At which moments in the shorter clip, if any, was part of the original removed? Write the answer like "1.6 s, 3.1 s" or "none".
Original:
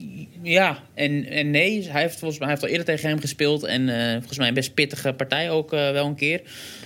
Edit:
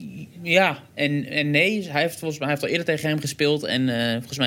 none